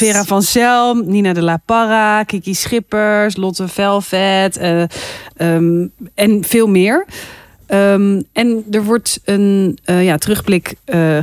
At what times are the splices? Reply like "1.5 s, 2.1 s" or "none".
none

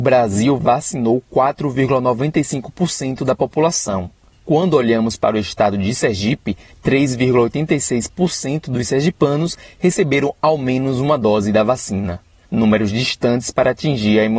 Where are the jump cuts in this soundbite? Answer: none

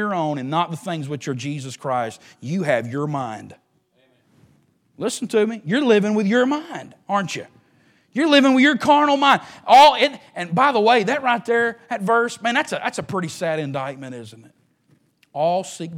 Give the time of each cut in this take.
none

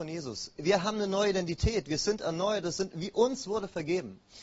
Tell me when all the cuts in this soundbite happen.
none

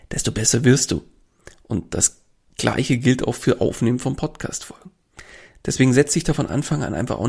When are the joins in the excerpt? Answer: none

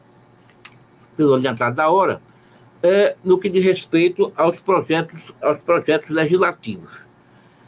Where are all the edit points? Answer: 5.4 s

